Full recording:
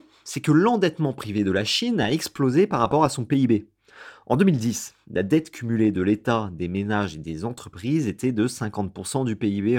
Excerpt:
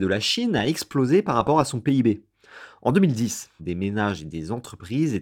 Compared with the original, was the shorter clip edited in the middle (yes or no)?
yes